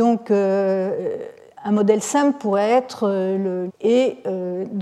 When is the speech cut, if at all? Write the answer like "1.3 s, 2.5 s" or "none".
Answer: 1.5 s, 3.7 s